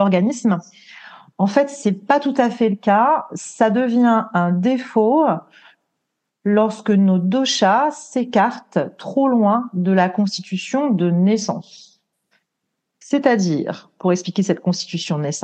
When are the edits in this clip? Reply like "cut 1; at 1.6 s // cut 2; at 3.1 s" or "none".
none

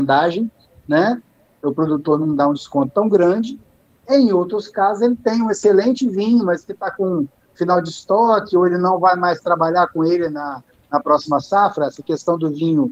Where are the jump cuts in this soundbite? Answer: none

